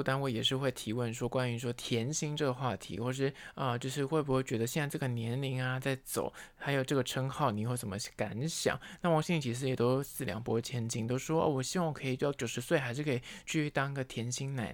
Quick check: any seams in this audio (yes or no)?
no